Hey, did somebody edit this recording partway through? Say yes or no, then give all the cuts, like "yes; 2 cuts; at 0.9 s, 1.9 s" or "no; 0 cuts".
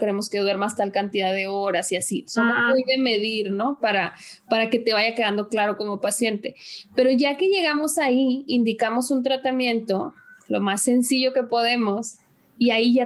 no; 0 cuts